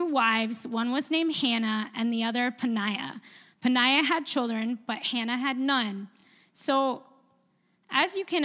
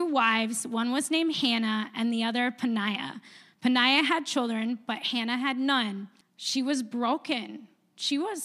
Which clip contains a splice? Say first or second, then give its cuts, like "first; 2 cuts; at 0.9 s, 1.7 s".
second; 1 cut; at 6.2 s